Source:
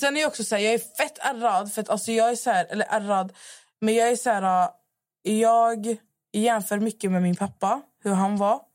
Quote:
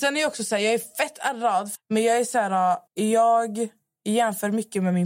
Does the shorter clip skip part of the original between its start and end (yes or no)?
yes